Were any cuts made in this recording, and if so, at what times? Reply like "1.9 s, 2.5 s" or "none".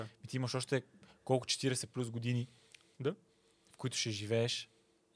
none